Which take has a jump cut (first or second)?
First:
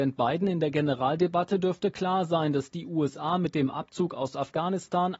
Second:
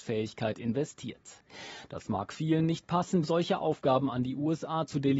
second